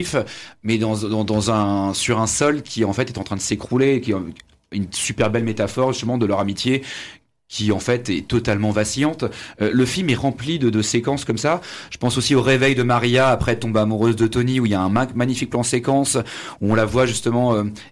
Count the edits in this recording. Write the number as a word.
one